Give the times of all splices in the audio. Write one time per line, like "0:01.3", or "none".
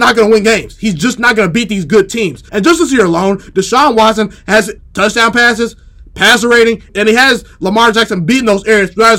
0:02.5
0:04.8
0:06.9